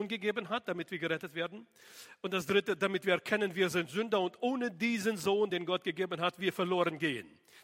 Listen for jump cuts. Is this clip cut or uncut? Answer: uncut